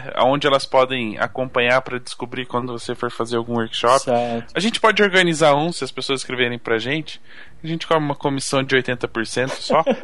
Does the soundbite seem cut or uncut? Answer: uncut